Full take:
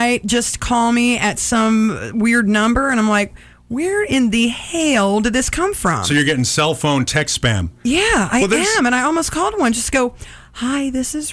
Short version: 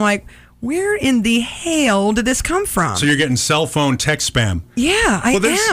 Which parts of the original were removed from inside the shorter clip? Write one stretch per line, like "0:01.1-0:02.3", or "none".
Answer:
none